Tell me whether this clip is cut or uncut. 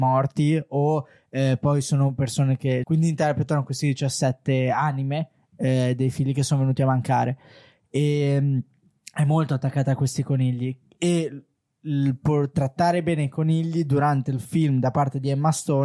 cut